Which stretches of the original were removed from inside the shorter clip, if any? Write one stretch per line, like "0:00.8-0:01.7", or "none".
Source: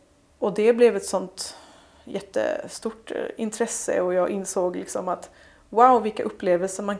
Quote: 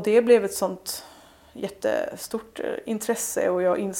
none